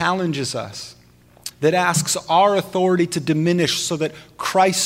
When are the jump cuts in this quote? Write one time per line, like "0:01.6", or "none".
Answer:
0:01.5